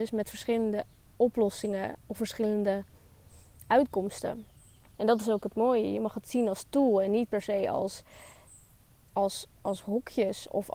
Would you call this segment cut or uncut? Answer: cut